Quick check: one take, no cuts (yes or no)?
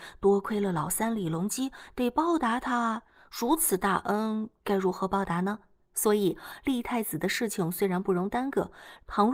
yes